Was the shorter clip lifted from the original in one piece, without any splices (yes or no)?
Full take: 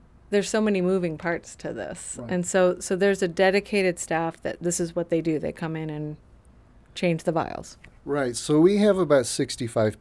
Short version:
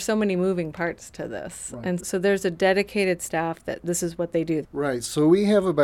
no